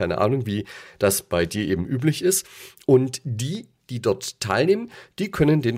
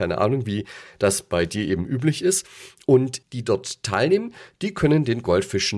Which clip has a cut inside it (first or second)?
second